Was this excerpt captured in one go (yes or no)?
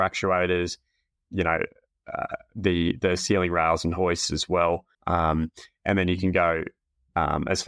no